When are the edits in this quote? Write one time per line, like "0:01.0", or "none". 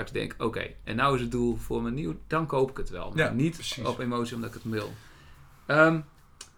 none